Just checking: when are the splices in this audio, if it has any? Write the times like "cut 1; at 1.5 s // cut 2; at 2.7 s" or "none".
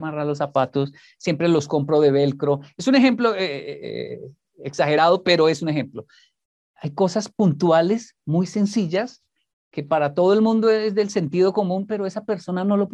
none